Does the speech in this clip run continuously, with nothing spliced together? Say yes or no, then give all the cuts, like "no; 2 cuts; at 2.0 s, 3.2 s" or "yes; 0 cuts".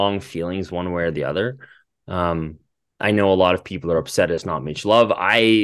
yes; 0 cuts